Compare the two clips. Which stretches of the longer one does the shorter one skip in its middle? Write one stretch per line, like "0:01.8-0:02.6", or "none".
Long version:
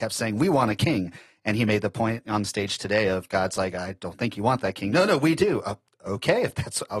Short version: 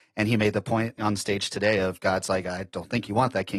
none